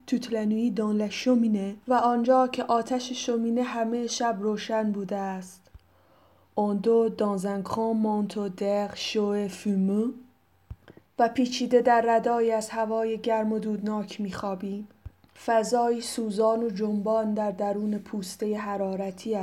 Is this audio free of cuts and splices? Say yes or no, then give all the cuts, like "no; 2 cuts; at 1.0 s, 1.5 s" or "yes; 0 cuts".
no; 2 cuts; at 1.8 s, 15.4 s